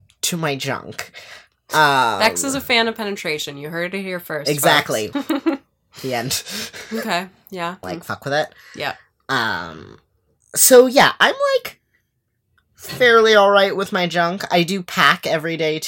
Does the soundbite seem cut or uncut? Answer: cut